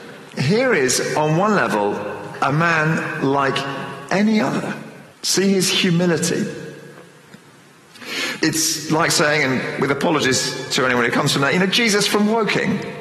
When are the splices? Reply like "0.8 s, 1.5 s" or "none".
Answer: 5.1 s, 8.4 s